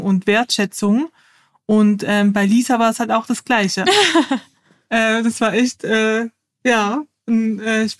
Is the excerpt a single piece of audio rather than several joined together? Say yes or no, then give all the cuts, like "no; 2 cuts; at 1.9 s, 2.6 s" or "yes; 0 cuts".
no; 1 cut; at 3.8 s